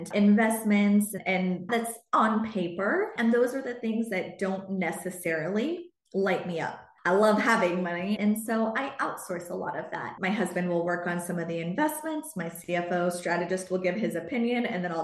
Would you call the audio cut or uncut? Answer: cut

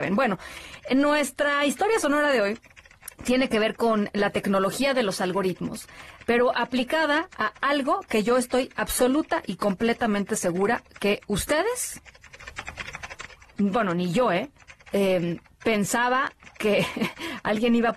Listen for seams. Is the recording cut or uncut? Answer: uncut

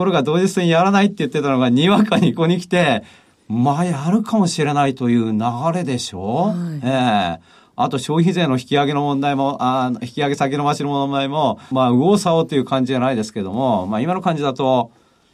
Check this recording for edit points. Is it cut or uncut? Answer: cut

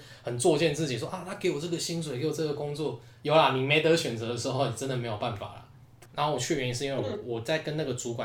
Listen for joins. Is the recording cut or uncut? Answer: cut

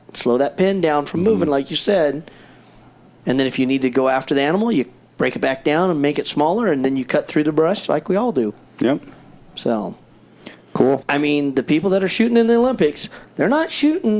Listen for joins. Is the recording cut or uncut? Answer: cut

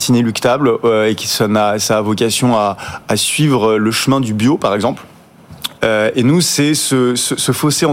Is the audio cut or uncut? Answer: cut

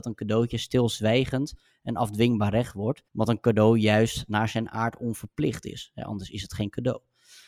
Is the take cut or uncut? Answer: cut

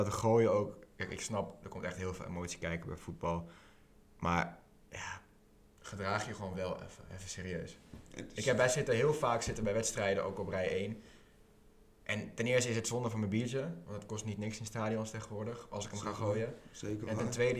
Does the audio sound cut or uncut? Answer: uncut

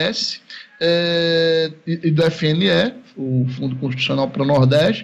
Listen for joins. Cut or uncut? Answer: uncut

